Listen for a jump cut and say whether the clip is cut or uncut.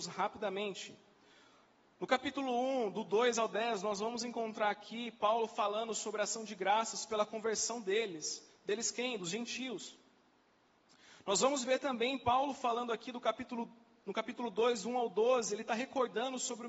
uncut